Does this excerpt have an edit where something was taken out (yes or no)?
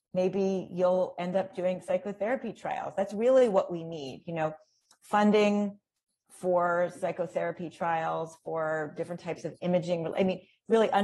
no